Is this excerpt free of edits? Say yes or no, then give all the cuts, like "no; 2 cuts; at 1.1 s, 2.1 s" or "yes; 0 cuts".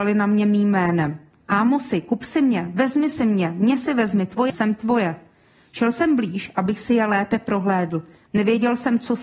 no; 2 cuts; at 4.5 s, 8.3 s